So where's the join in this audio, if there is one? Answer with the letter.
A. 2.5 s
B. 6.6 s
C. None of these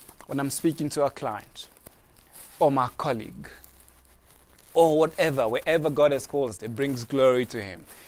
B